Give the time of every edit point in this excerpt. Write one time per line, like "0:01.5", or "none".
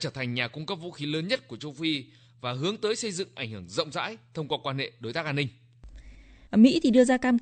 0:06.5